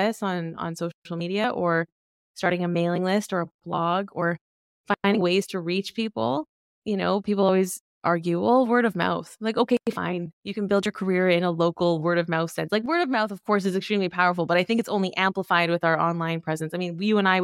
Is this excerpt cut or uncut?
uncut